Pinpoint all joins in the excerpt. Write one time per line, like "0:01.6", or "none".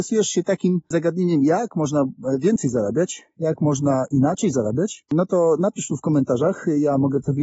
none